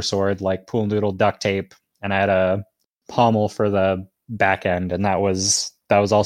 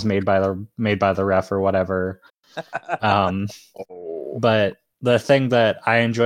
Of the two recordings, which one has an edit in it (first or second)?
second